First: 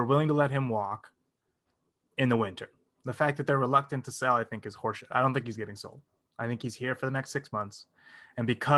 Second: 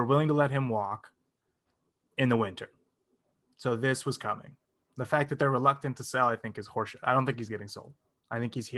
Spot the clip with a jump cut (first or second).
first